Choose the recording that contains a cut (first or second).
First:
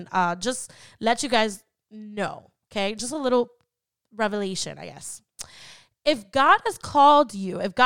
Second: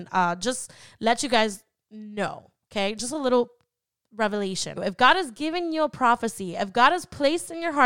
second